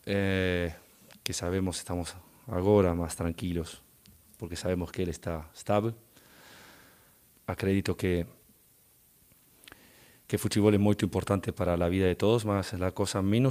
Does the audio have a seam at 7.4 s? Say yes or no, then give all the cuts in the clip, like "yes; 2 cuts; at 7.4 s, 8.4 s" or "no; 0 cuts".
yes; 1 cut; at 7.4 s